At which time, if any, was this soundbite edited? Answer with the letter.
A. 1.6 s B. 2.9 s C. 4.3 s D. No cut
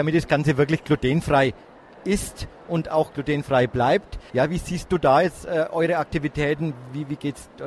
D